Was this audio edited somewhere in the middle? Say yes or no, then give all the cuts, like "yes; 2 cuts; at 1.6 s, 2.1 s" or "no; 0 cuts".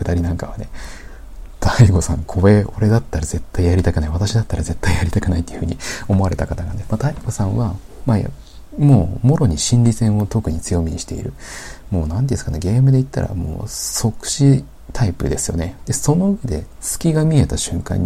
yes; 2 cuts; at 6.8 s, 15.8 s